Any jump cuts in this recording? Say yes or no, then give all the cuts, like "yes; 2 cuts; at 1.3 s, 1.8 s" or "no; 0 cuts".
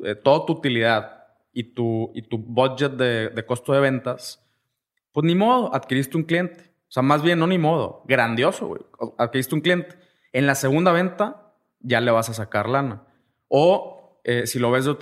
no; 0 cuts